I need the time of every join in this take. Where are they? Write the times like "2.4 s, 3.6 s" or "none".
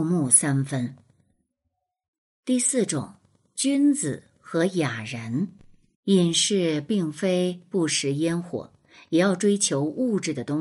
5.9 s